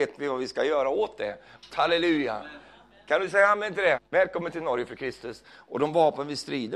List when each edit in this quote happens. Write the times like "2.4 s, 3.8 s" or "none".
1.7 s, 3.9 s, 5.4 s